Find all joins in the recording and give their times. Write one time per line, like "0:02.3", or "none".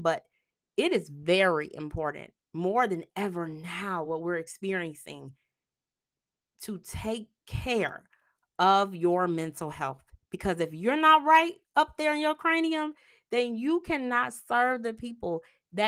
none